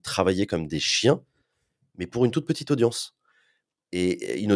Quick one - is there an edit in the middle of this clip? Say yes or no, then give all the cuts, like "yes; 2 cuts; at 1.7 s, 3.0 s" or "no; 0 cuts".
no; 0 cuts